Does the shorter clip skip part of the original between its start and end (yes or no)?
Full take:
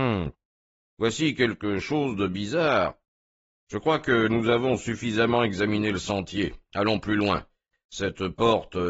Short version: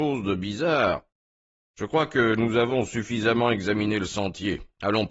no